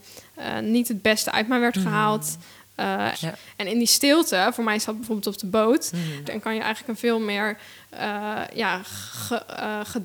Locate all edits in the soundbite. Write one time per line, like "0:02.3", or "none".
0:03.1
0:06.2